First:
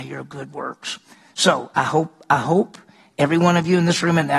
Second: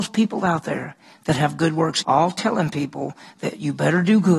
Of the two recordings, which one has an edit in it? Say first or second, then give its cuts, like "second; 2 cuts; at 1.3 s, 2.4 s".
second; 1 cut; at 2.0 s